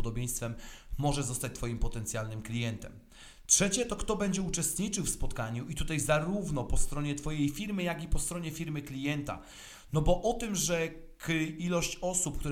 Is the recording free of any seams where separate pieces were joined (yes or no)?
yes